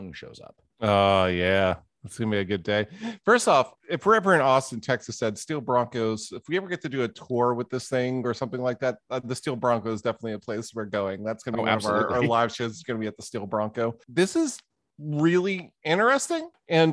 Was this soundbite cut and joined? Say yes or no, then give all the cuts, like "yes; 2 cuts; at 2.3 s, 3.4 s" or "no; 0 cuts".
no; 0 cuts